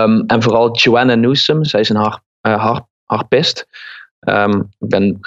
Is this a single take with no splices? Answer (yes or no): yes